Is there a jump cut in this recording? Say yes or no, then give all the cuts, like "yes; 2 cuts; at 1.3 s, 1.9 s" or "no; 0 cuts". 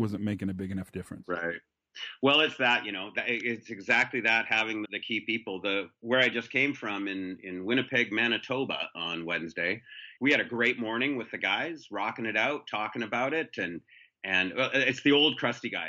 yes; 2 cuts; at 4.8 s, 10.2 s